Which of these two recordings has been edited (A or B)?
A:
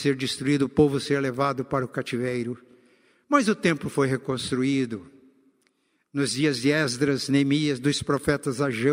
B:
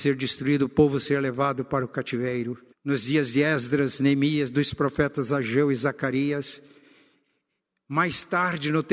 B